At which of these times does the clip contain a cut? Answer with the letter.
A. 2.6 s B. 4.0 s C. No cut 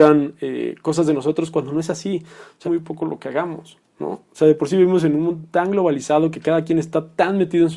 A